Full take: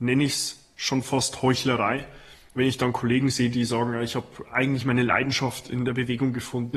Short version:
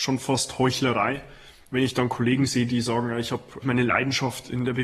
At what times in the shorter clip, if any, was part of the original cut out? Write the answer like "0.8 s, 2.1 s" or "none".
3.6 s